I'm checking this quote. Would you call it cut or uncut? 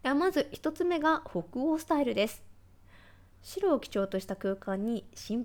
uncut